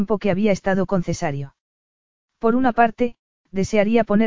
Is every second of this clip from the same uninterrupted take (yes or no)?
no